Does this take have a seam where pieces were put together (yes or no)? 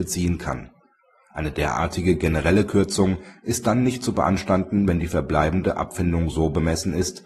no